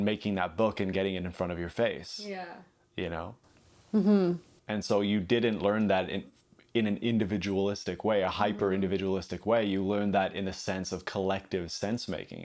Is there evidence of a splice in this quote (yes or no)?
yes